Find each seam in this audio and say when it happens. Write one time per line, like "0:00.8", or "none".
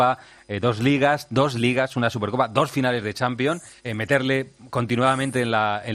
0:03.8